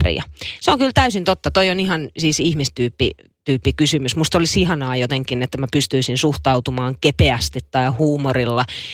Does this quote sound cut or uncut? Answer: uncut